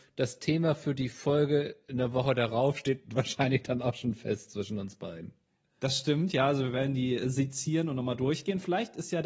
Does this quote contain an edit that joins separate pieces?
no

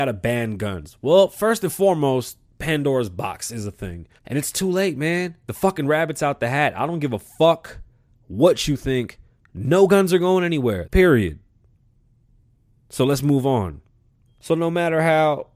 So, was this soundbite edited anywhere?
yes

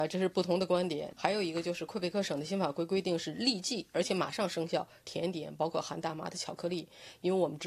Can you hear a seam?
yes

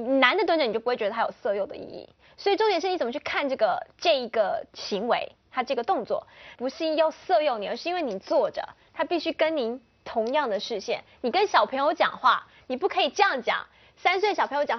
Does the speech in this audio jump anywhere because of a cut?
yes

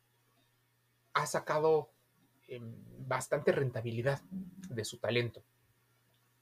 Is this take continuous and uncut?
yes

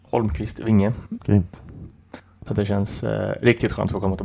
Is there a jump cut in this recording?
yes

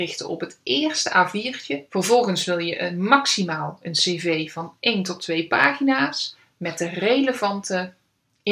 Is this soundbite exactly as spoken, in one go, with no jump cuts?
no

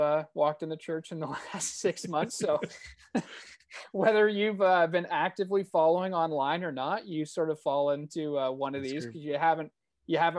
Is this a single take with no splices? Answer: yes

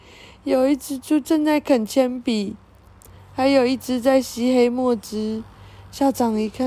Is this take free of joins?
yes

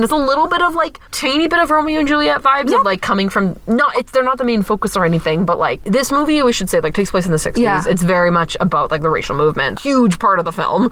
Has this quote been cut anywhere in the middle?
yes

